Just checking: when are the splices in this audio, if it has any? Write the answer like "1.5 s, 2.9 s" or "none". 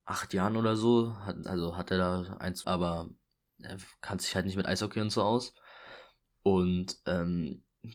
1.4 s, 2.6 s